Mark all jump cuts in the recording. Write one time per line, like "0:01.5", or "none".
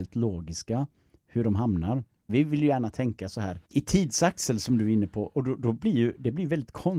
0:02.3
0:03.6